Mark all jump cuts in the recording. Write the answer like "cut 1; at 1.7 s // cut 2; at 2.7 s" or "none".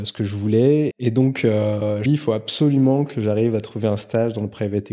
cut 1; at 0.9 s // cut 2; at 2.1 s